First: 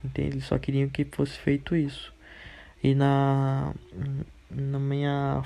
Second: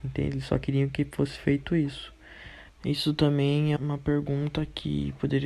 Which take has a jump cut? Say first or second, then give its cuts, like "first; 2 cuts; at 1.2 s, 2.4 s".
second; 2 cuts; at 2.7 s, 3.8 s